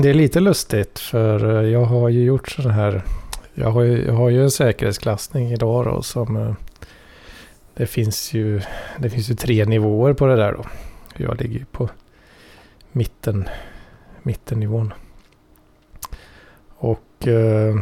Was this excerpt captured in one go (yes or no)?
yes